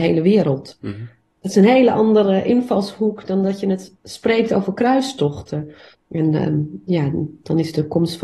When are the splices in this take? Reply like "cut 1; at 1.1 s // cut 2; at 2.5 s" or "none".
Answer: cut 1; at 5.9 s

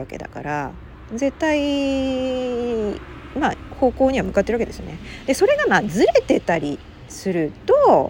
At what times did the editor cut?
none

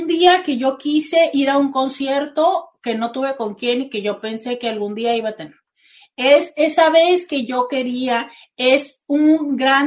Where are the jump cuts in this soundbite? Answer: none

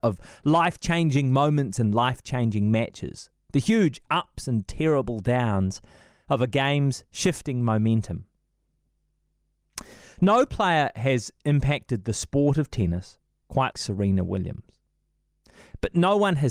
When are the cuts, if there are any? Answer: cut 1; at 13.7 s

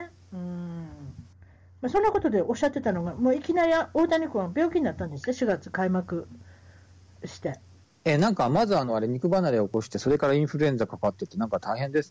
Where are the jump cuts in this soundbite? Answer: none

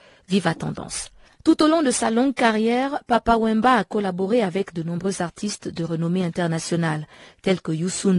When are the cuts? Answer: none

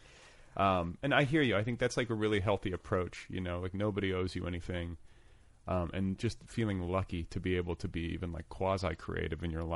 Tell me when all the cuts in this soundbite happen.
none

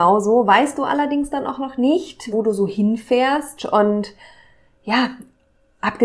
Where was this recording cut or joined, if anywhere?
cut 1; at 2.3 s // cut 2; at 3.6 s

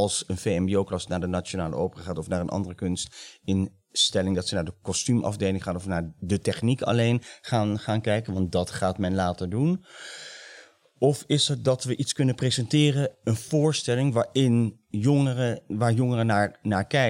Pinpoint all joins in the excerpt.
none

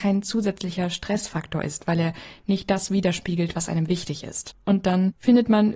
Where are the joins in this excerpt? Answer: cut 1; at 4.6 s

